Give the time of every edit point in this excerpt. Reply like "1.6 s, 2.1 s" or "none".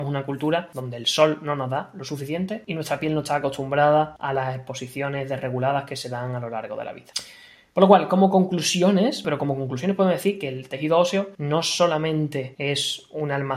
9.2 s

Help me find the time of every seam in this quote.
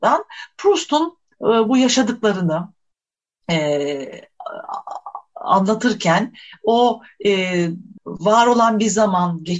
8.0 s

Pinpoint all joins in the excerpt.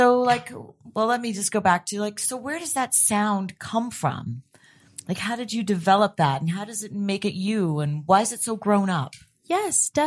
none

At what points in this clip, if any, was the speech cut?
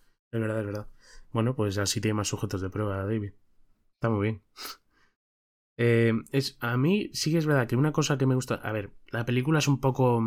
none

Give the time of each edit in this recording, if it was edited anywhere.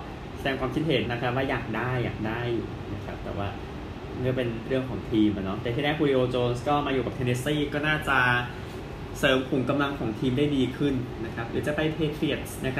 1.0 s

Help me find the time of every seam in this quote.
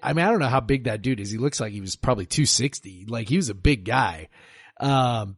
none

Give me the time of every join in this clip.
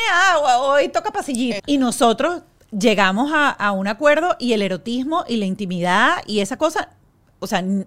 1.6 s

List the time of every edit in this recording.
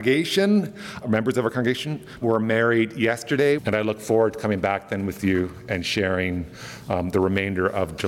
1.0 s, 2.2 s, 3.6 s

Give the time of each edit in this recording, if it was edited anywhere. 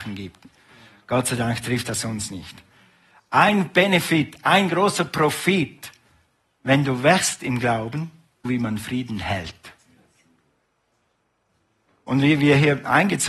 8.4 s

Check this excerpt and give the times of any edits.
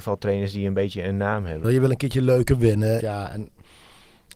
1.6 s, 3.0 s

